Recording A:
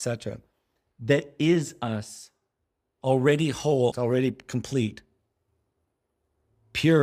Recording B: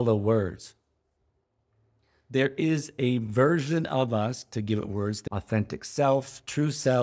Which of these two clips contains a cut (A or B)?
A